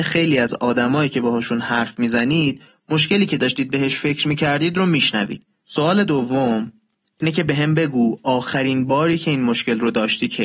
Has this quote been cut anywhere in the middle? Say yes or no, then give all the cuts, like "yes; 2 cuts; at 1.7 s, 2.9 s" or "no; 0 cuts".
yes; 1 cut; at 5.6 s